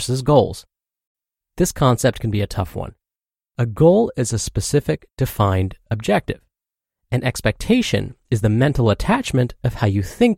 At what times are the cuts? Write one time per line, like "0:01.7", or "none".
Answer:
none